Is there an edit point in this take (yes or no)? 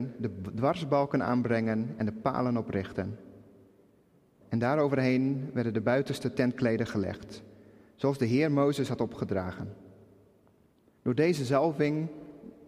yes